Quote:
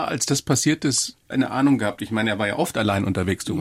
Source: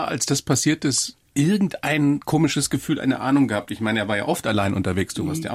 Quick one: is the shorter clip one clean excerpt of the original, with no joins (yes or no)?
no